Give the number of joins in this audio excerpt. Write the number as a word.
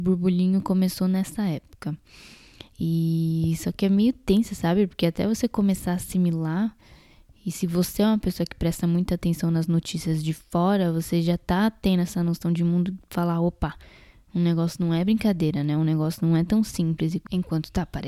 zero